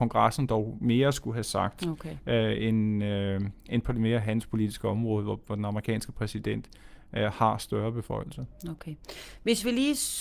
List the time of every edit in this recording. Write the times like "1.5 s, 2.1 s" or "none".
none

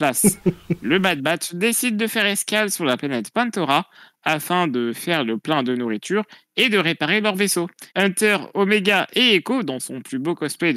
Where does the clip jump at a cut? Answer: 7.9 s

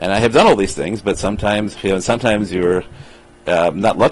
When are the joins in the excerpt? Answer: none

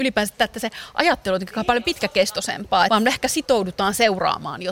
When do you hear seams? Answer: 2.9 s

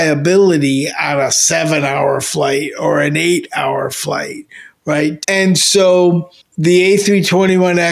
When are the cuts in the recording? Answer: 5.2 s

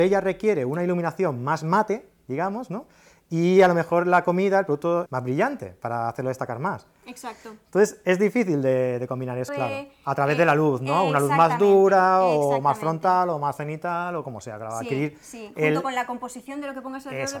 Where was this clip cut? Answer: 5.1 s, 9.5 s

